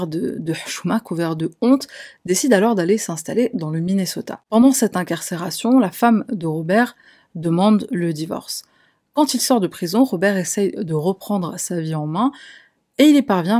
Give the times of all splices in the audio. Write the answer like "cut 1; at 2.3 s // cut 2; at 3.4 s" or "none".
none